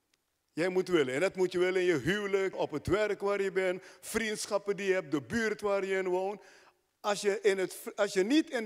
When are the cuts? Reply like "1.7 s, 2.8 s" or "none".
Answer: 2.5 s, 6.9 s